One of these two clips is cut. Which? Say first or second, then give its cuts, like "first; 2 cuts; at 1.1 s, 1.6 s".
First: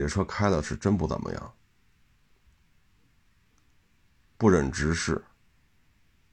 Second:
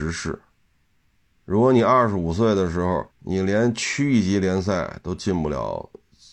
second; 2 cuts; at 1.4 s, 3.1 s